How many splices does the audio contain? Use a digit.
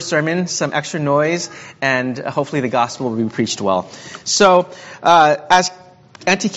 0